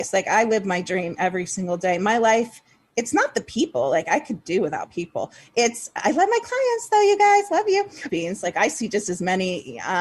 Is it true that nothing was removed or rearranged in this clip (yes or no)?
no